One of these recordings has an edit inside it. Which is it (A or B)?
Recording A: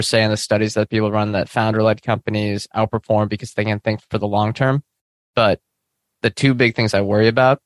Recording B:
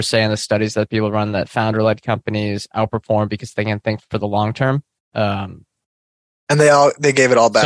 B